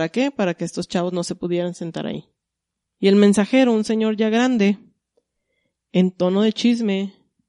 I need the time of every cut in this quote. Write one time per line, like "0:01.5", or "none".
0:03.0